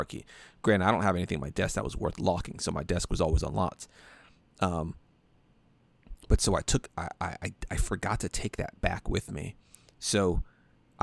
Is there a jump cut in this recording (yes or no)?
no